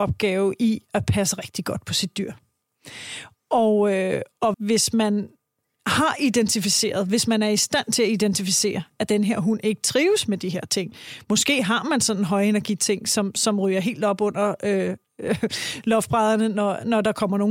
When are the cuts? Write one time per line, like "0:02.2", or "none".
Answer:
0:04.5